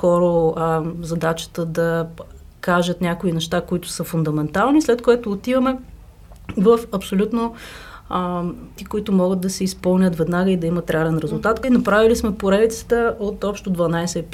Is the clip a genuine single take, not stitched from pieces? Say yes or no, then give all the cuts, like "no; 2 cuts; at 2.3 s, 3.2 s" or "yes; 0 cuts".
no; 2 cuts; at 8.8 s, 11.6 s